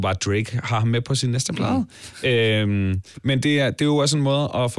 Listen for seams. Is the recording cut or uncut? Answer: uncut